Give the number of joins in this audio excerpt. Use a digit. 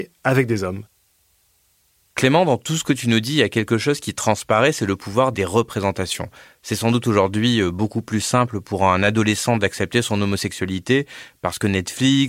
0